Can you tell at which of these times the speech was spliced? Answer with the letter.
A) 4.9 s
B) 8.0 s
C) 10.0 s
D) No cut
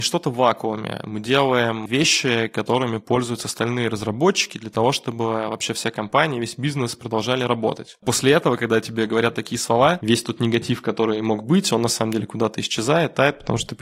B